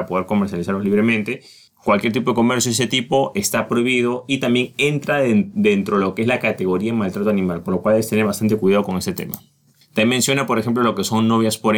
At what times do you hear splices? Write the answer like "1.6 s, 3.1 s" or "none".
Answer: none